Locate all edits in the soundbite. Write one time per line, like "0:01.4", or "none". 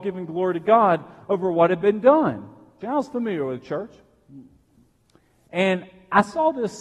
0:02.8